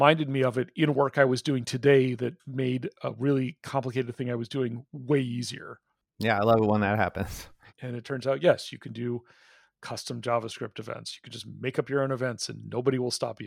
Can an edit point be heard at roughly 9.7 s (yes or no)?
no